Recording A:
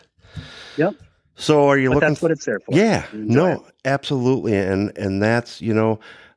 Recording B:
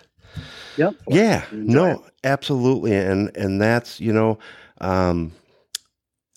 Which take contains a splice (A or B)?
B